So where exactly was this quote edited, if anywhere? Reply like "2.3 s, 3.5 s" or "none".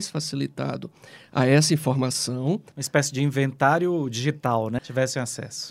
2.7 s, 4.8 s